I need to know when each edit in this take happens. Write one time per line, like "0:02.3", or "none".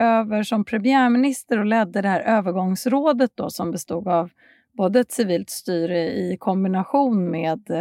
none

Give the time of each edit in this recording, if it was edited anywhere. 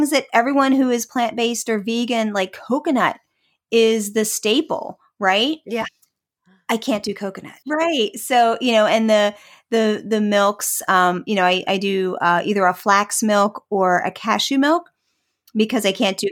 0:07.6

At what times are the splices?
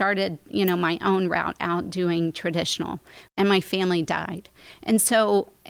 0:03.3

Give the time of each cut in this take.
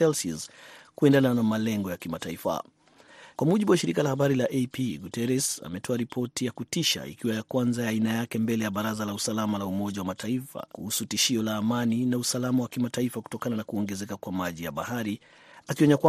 0:03.3
0:10.7

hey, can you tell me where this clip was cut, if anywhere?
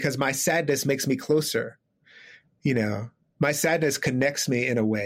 none

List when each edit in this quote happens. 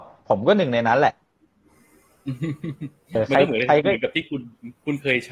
0:03.2

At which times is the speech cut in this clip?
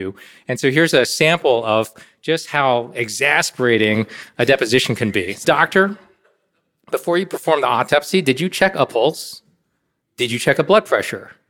0:05.4
0:10.0

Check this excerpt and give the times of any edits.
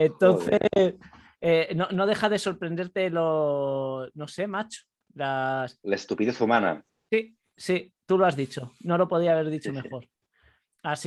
none

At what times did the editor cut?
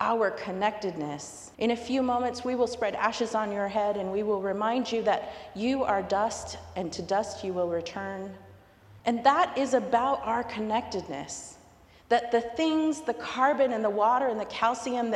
0:01.5
0:09.0

